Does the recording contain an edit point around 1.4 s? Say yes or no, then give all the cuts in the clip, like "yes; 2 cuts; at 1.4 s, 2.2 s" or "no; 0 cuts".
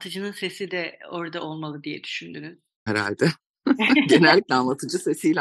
no; 1 cut; at 2.9 s